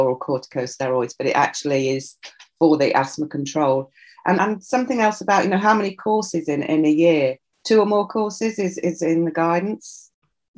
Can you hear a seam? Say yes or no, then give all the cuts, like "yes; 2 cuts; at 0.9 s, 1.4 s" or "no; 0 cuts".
yes; 1 cut; at 4.4 s